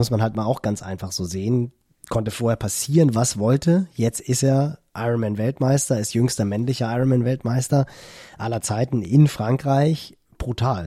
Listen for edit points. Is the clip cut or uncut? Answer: uncut